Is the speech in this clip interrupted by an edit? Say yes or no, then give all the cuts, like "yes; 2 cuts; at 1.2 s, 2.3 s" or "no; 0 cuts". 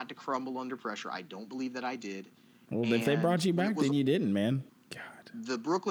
yes; 1 cut; at 4.7 s